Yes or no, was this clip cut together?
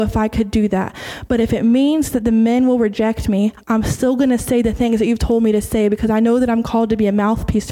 no